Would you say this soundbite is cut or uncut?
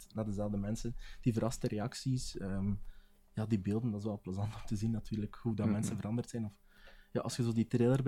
uncut